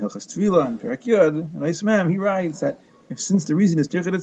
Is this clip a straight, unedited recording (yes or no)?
yes